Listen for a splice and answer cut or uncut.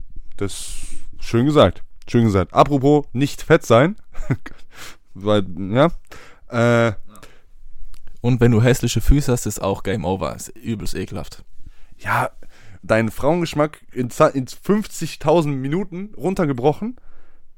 cut